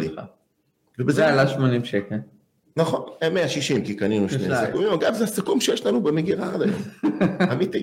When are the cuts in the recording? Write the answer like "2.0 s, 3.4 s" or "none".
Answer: none